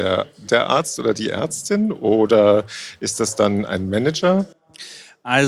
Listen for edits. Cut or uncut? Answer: uncut